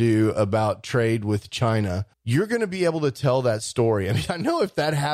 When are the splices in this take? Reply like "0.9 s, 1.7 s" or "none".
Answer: 2.1 s